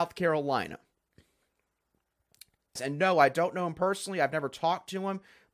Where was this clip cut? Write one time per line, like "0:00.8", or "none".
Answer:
0:02.8